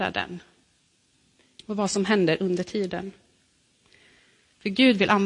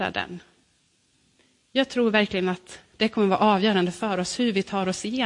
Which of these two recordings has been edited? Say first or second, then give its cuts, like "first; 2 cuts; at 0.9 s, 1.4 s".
first; 1 cut; at 1.6 s